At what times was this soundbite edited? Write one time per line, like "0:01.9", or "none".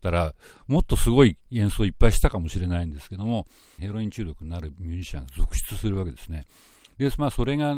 0:03.8